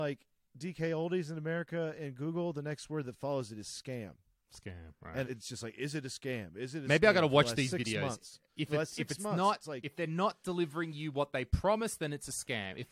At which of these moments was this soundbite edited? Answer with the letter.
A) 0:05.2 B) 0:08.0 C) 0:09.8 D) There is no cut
A